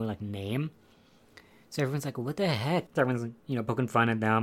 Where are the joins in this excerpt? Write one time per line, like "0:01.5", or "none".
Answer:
0:02.9